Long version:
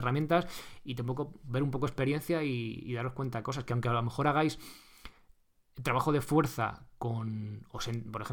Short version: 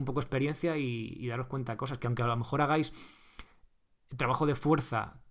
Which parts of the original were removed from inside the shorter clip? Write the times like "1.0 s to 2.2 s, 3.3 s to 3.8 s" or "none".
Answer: none